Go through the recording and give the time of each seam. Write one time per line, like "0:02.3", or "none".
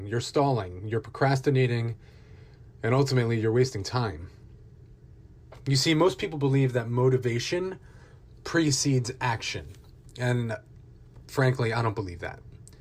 none